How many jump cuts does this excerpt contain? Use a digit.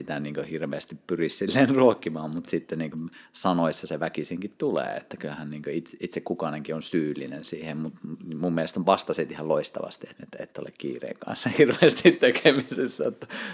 1